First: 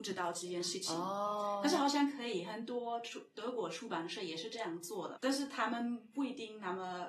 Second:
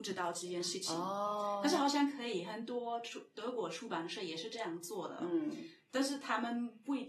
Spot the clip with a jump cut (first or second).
first